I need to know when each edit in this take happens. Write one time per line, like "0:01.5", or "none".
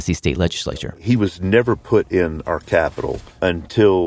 none